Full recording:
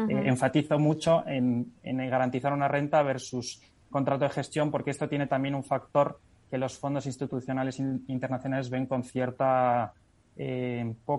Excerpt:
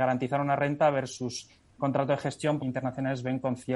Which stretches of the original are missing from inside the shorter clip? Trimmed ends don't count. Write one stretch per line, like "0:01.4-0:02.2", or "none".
0:04.7-0:08.1